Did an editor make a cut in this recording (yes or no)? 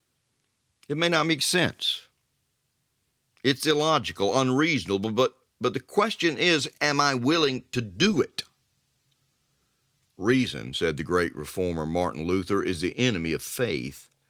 no